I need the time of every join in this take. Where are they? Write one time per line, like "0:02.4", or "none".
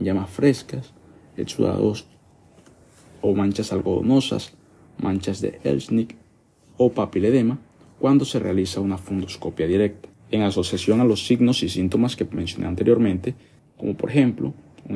0:10.1
0:13.6

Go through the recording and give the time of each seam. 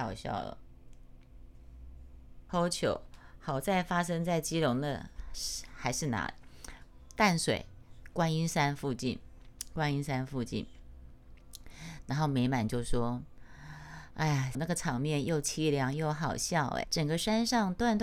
0:14.5
0:16.8

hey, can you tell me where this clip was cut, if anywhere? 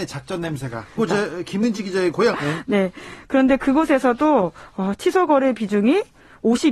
0:01.0
0:02.3

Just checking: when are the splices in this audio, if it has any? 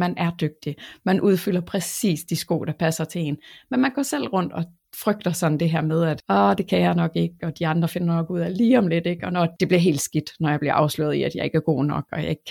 none

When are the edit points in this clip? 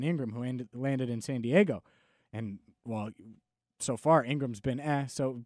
none

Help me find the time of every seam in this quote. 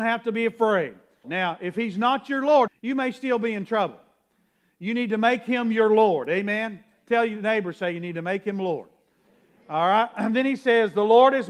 0:01.2
0:02.7

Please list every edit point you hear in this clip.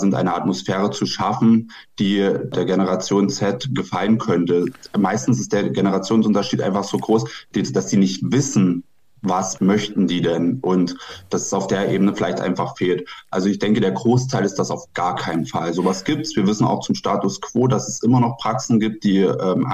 none

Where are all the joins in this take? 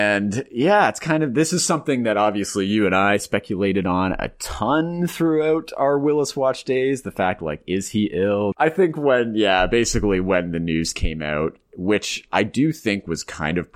0:08.5

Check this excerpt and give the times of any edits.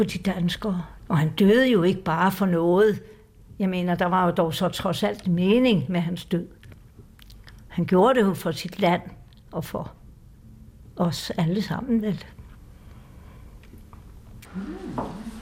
0:01.0
0:14.4

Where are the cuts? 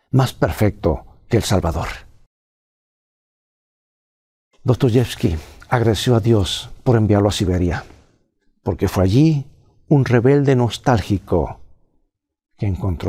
none

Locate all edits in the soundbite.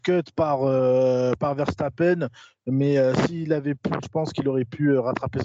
0:04.0

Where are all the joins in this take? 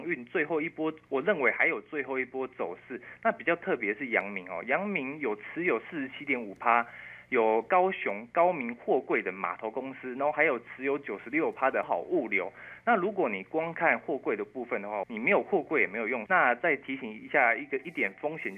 0:11.8
0:15.0
0:16.3

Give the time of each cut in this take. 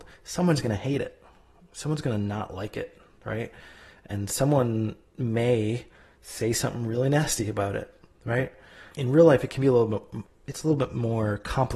0:08.9
0:10.3

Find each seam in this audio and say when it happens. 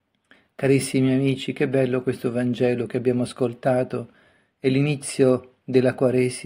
none

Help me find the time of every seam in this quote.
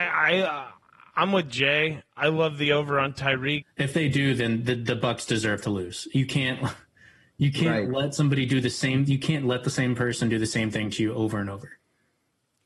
0:03.6

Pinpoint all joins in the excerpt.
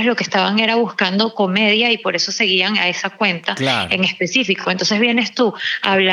none

